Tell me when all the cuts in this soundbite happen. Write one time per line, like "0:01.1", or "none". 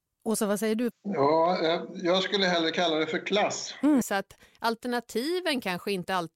0:00.9
0:04.0